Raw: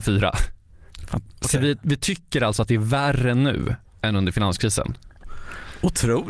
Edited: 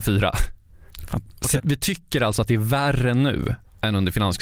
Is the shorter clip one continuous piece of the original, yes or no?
no